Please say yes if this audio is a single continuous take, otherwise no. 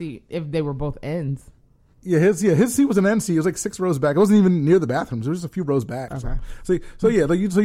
no